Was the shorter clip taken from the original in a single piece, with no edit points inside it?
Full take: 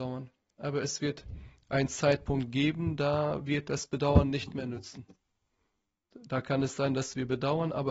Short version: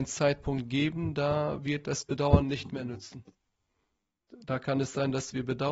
yes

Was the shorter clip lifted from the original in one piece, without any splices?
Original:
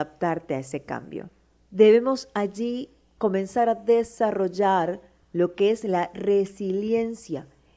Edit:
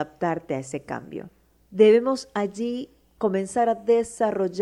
yes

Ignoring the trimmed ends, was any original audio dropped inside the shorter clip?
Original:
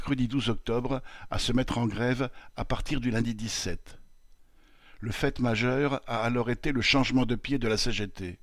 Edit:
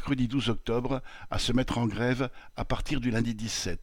no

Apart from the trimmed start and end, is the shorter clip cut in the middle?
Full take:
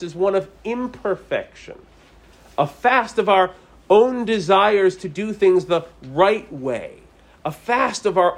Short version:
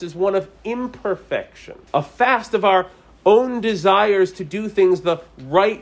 yes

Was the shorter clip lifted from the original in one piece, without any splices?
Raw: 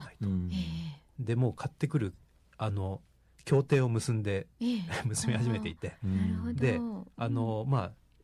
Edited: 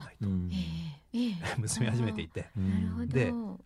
no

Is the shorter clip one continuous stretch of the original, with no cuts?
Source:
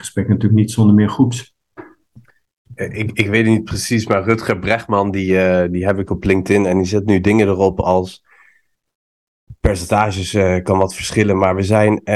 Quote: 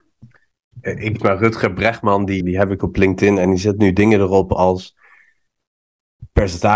no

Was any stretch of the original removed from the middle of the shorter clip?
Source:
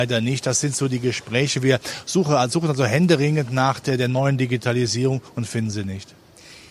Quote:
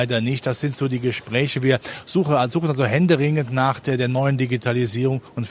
no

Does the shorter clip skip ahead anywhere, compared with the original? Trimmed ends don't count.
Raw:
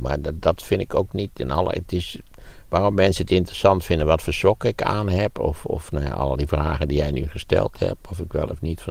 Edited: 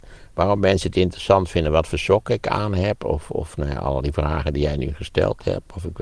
no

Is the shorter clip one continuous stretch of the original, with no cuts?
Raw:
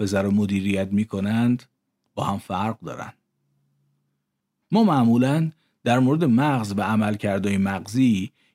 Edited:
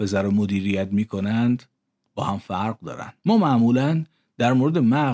no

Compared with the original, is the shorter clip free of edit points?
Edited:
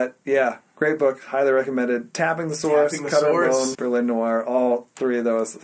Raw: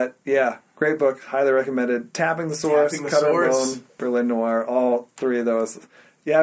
no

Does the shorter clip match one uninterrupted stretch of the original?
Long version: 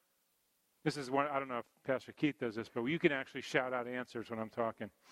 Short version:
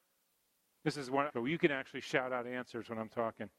no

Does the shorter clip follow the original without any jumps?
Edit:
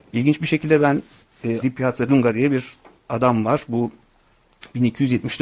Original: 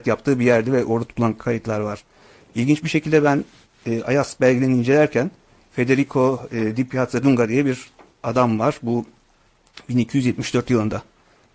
no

